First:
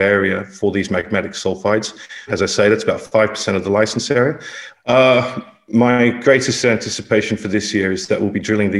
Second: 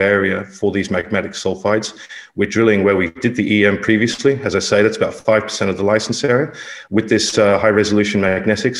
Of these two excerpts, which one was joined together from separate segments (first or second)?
first